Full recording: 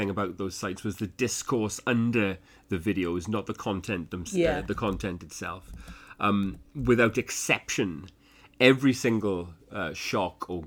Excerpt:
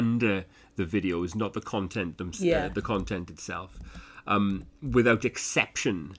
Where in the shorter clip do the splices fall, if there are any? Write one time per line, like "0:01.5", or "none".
none